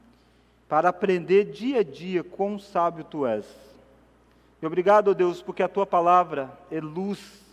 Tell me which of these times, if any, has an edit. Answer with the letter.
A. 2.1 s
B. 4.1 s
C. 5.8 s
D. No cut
D